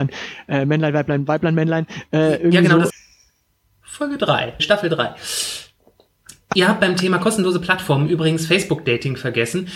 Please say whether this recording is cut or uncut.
cut